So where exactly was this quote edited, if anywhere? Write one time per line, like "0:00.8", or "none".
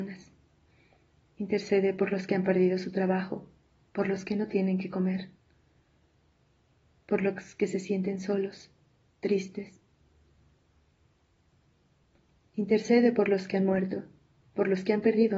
0:01.2
0:12.4